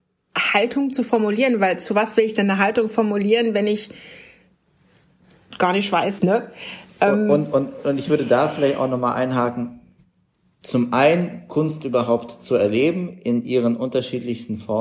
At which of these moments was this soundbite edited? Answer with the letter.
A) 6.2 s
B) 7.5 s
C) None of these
A